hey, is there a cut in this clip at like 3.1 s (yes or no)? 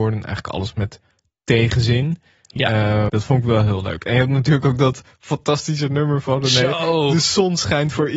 yes